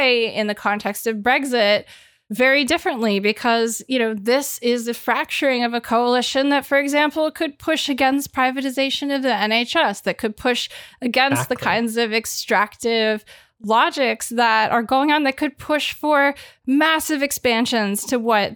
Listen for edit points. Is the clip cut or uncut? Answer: uncut